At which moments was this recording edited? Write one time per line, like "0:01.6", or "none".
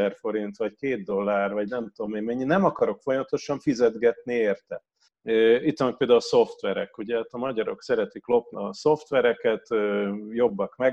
0:05.1
0:08.5